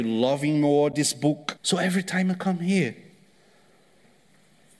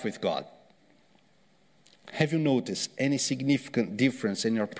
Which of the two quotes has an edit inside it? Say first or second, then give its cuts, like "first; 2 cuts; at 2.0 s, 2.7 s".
first; 1 cut; at 1.6 s